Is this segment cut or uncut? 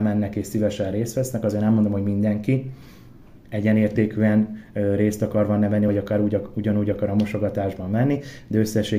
uncut